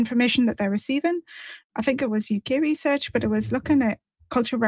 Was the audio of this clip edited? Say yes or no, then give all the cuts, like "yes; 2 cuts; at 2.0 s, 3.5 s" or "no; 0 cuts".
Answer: yes; 1 cut; at 1.6 s